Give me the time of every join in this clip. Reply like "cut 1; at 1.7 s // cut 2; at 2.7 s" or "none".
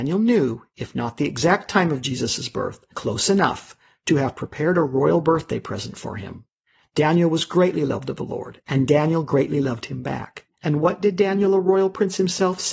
cut 1; at 2.9 s // cut 2; at 10.5 s